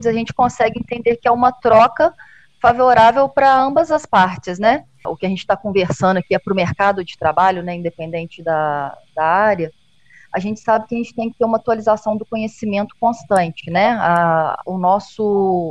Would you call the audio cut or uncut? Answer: cut